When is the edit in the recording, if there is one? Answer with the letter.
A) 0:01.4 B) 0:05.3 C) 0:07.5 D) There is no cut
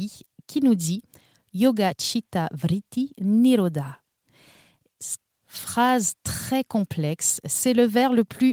B